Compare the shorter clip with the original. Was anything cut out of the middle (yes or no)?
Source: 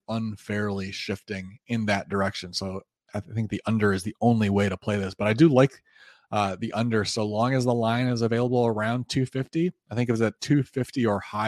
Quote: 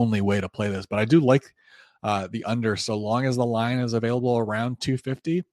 no